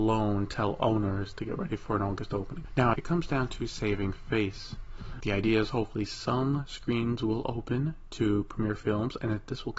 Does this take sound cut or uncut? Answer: cut